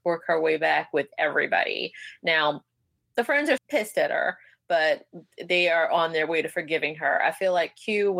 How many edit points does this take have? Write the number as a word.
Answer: one